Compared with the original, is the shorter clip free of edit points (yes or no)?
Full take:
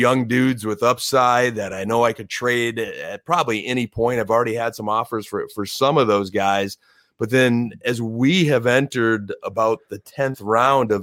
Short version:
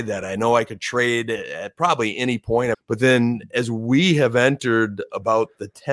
no